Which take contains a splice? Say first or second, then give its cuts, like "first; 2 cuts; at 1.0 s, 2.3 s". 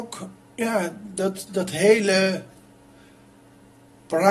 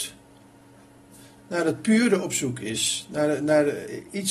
first; 1 cut; at 1.5 s